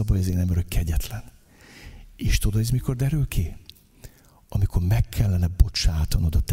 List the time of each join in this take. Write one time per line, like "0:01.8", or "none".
none

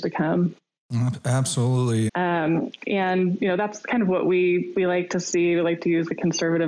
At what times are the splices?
0:02.1

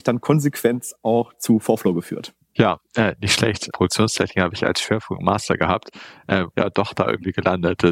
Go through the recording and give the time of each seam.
0:03.7
0:06.5

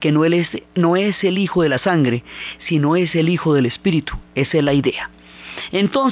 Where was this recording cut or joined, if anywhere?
none

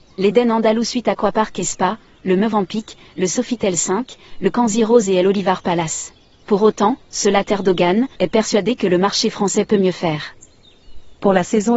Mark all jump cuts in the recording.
0:06.4
0:08.2

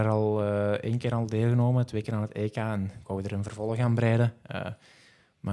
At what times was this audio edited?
none

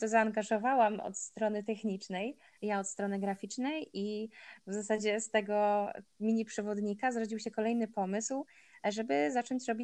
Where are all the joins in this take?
0:02.6

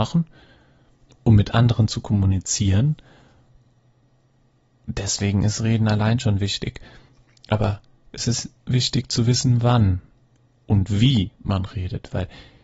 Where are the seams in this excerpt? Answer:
none

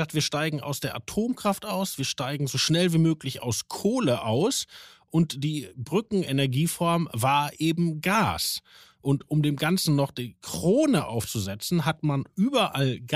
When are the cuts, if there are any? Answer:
none

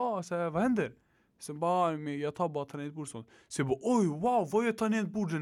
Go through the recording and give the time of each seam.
none

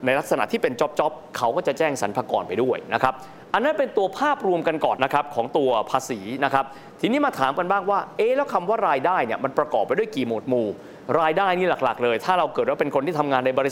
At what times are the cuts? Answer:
0:05.0

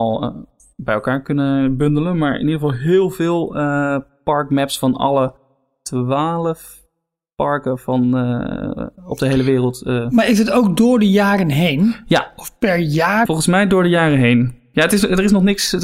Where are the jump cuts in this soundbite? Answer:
0:13.3

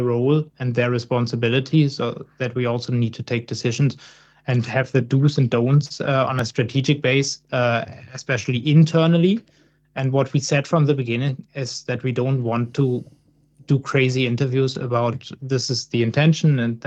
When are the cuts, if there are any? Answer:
none

